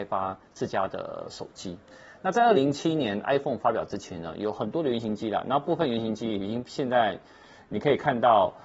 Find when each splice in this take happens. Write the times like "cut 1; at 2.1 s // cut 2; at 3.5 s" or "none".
cut 1; at 2.5 s